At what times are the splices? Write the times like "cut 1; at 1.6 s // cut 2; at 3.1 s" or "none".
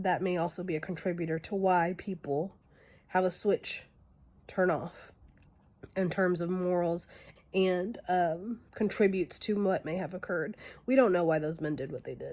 cut 1; at 7.4 s // cut 2; at 8.7 s